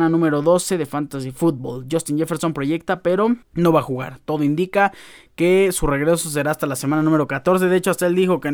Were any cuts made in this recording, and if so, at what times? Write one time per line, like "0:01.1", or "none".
0:03.4